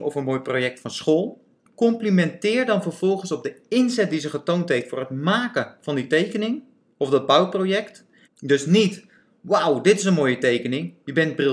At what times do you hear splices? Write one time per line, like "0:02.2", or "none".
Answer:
0:08.2